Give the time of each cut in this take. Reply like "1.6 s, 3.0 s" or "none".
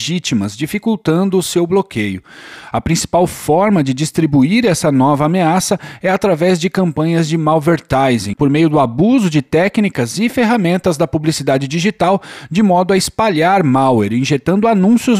2.7 s, 8.3 s